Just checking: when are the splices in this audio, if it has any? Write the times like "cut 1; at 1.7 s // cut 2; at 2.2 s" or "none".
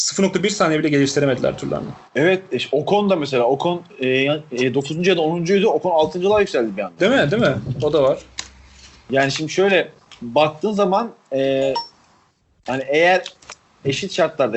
none